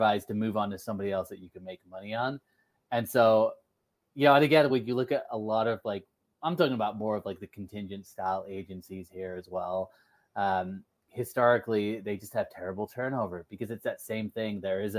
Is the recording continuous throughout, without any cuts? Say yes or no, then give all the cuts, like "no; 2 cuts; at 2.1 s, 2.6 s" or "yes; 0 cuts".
yes; 0 cuts